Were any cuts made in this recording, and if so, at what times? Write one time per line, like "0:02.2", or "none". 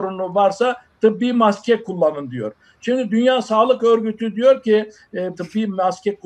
0:05.3